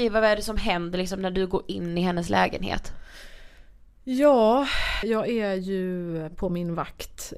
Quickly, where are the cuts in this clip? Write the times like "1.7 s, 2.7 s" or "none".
5.0 s